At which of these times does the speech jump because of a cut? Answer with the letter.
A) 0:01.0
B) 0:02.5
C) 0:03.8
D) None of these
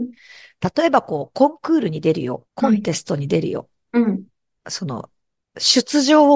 B